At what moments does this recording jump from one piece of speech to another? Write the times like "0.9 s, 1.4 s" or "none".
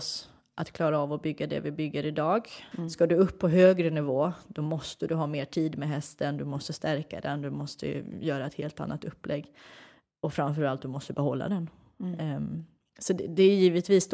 2.7 s